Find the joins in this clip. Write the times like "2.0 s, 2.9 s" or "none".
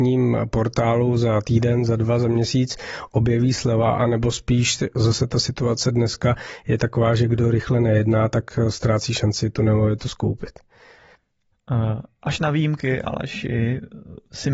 none